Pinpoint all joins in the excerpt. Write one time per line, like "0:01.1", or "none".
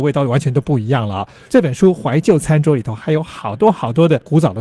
none